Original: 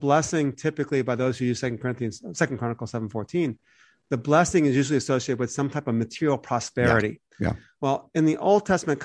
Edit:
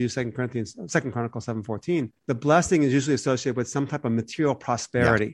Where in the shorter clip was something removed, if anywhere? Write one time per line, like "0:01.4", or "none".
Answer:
0:02.2